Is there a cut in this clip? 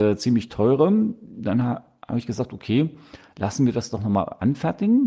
no; 0 cuts

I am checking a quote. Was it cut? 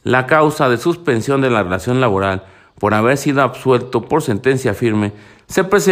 no; 0 cuts

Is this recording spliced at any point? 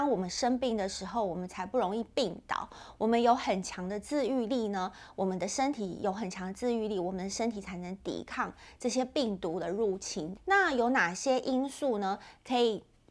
no; 0 cuts

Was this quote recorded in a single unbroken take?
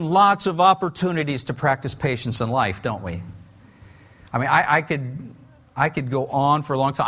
yes; 0 cuts

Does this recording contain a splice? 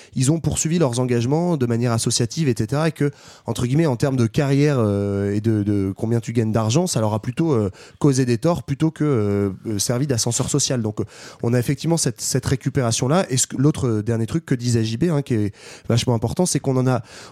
no; 0 cuts

